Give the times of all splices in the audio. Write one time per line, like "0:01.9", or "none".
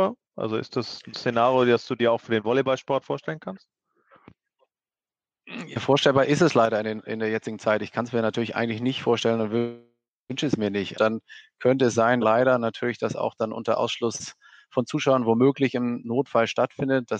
0:10.9
0:12.2